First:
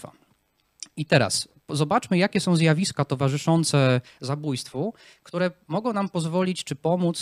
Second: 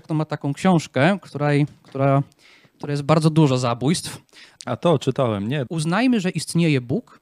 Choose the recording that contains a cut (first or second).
second